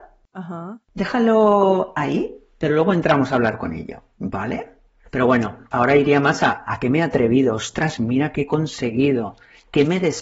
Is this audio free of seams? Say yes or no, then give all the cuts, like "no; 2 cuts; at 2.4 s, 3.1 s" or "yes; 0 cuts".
yes; 0 cuts